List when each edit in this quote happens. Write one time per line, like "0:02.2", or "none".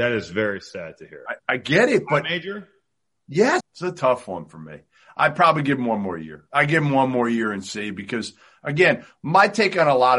0:03.6